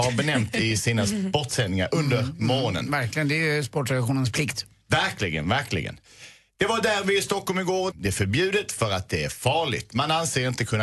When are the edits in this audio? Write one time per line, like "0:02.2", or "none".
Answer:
0:07.9

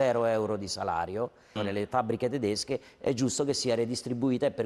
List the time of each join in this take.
0:01.6

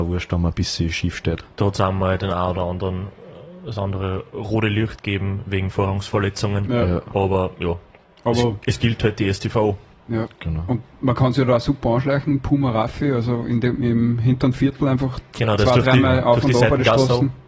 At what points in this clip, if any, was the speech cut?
none

